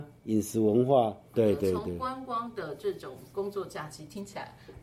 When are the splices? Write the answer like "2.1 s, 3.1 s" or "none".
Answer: 1.3 s

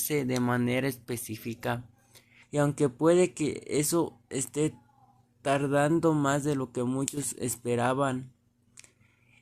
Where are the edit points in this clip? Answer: 2.4 s

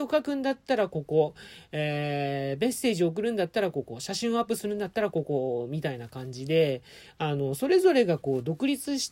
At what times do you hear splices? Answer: none

